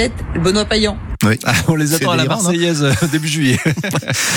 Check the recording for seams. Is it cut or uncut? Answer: uncut